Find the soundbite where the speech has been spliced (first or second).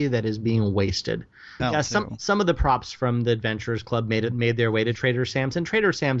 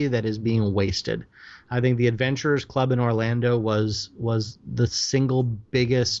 first